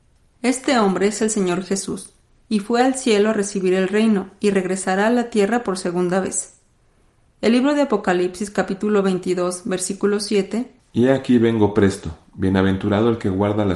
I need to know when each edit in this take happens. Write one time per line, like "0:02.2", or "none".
0:10.8